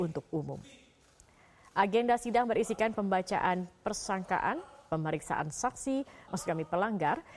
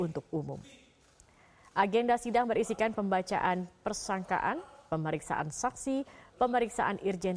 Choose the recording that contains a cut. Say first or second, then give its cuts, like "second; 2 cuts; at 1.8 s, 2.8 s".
first; 1 cut; at 6.3 s